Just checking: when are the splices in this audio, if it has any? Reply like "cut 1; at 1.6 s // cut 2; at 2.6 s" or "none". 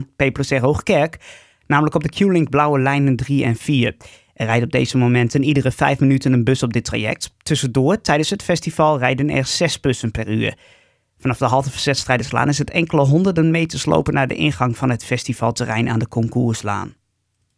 none

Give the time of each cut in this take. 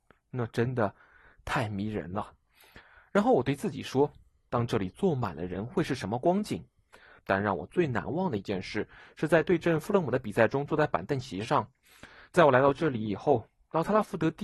cut 1; at 7.2 s

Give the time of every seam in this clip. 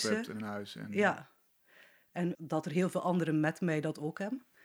cut 1; at 2.3 s

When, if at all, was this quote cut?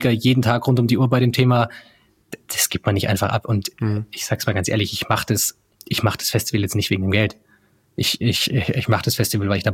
none

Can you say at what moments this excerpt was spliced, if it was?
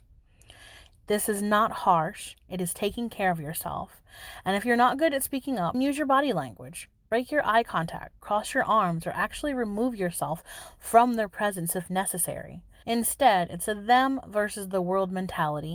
cut 1; at 5.7 s // cut 2; at 12.8 s

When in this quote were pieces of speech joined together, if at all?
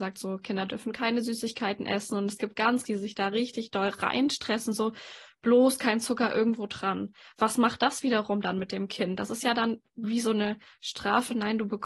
cut 1; at 2.8 s

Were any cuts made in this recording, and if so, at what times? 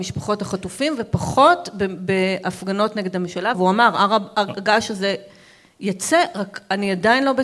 cut 1; at 3.5 s

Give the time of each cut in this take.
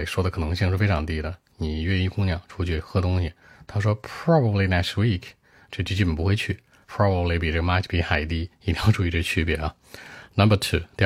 cut 1; at 6.8 s

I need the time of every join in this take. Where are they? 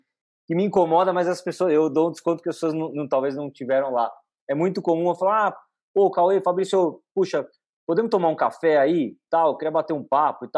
none

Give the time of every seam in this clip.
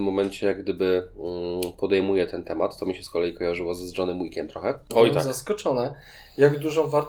cut 1; at 4.9 s

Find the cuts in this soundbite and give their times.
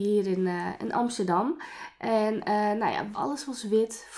cut 1; at 3.1 s

